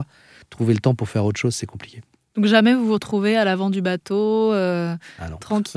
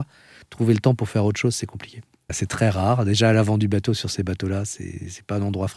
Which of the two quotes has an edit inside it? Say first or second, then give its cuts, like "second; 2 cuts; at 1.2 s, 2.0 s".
second; 1 cut; at 2.3 s